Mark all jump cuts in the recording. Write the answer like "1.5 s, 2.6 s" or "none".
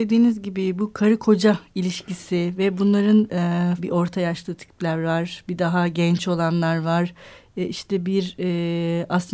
3.8 s